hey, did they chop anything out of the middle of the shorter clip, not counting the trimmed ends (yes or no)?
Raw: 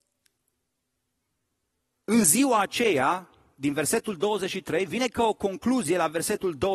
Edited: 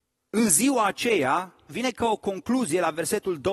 yes